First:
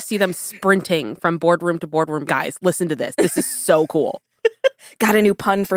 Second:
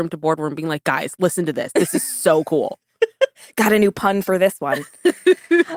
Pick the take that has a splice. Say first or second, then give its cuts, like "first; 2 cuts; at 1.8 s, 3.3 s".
first; 1 cut; at 2.3 s